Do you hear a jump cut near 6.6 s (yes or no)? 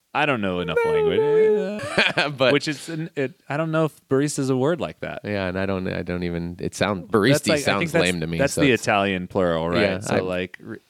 no